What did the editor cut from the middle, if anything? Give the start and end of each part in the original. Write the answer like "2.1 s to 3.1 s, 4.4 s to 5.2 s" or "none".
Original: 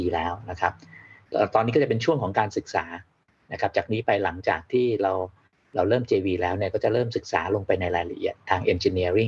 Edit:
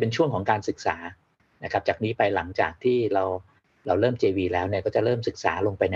none